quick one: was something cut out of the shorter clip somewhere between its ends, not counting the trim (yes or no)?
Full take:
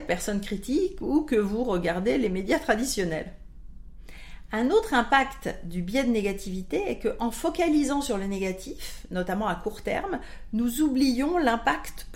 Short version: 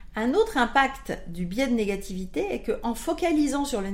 no